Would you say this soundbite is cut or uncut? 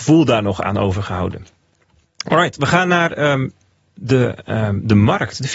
uncut